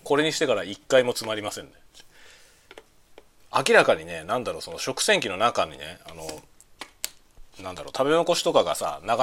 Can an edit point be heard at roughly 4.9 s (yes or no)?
no